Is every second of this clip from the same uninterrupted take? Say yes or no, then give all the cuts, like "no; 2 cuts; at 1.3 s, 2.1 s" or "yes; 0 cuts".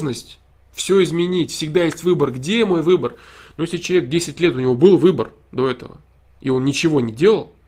yes; 0 cuts